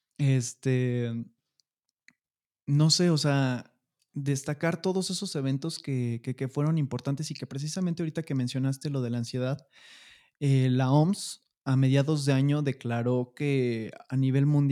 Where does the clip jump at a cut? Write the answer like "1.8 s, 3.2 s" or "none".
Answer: none